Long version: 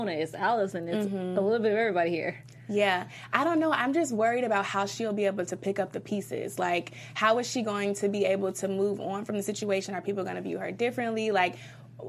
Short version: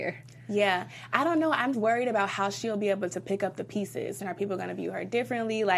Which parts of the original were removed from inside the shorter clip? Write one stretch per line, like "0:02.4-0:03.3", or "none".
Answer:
0:03.9-0:04.1
0:06.6-0:09.9